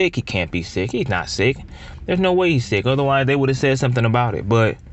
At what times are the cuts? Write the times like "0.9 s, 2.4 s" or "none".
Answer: none